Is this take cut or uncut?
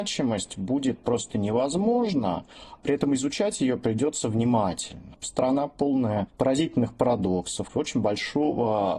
cut